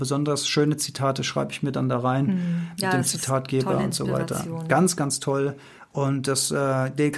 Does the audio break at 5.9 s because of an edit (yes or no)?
no